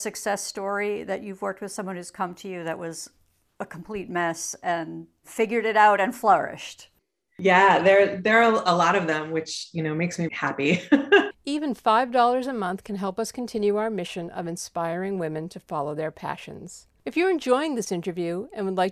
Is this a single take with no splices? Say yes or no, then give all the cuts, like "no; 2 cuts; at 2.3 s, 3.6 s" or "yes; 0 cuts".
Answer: no; 3 cuts; at 10.3 s, 11.3 s, 17.0 s